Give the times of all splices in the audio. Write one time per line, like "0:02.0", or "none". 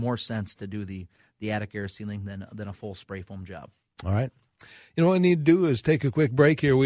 none